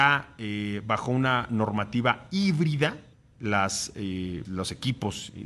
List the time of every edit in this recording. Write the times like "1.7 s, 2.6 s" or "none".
3.3 s, 4.4 s

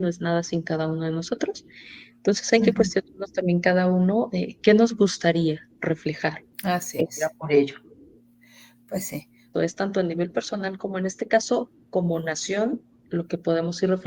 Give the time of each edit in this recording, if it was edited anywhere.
6.5 s, 9.5 s

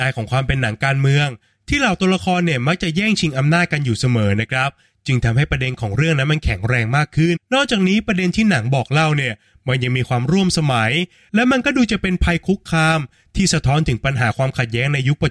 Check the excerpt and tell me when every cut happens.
7.4 s

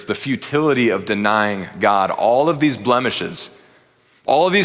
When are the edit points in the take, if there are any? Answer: none

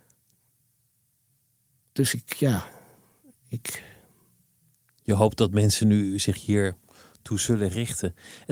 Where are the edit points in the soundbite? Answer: none

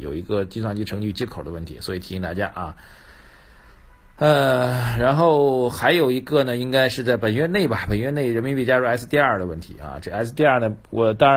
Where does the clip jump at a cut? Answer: none

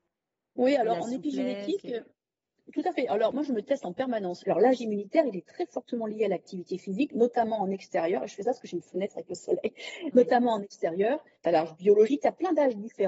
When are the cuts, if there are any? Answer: 4.4 s, 11.4 s

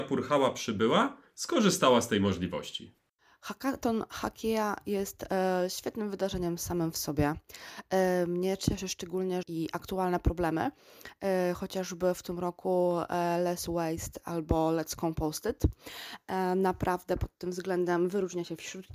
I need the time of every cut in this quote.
9.4 s

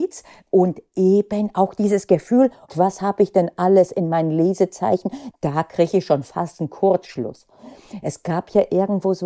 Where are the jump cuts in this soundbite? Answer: 2.7 s, 5.3 s

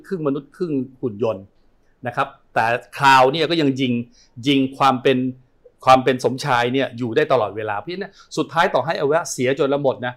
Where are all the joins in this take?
none

